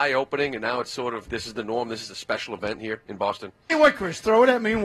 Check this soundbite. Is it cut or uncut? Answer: cut